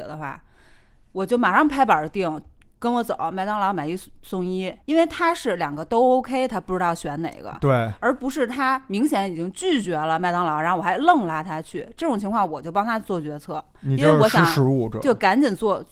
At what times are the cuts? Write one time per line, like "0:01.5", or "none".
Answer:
0:04.8

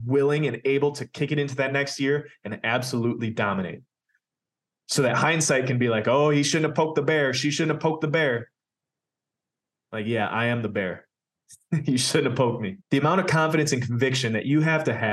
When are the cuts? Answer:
0:12.8

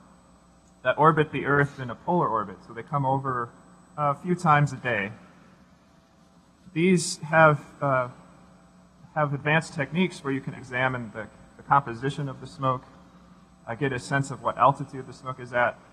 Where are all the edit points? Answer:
0:10.6

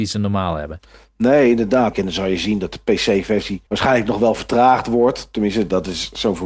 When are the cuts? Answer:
0:01.9
0:03.7

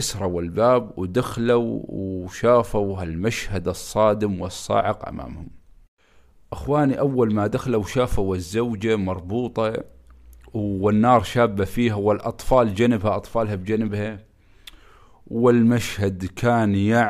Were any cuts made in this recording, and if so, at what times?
none

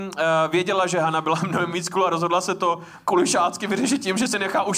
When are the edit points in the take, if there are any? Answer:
none

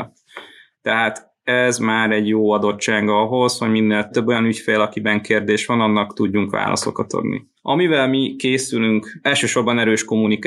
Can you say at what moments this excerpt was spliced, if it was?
0:07.6

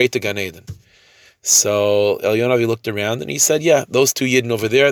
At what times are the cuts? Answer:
none

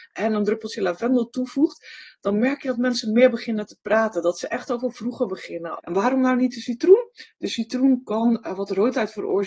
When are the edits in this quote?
0:05.8

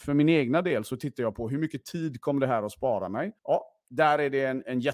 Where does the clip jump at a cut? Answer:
0:03.4

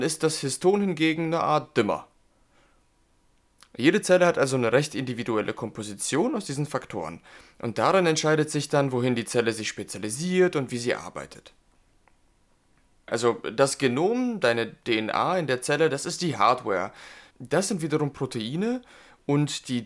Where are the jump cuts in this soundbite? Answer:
0:13.1
0:17.3

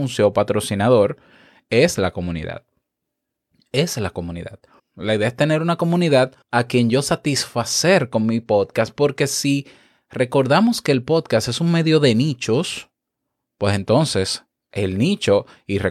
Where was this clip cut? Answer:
0:04.8
0:06.4

